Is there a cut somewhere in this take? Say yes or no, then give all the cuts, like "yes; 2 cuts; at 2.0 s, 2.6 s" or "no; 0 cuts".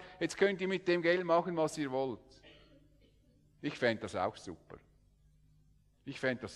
no; 0 cuts